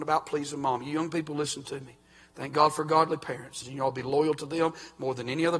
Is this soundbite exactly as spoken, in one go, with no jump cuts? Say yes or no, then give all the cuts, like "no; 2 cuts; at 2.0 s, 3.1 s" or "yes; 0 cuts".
no; 1 cut; at 3.6 s